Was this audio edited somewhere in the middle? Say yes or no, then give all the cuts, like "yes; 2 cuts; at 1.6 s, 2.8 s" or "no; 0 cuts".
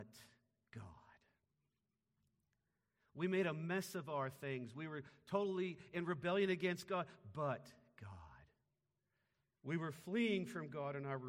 no; 0 cuts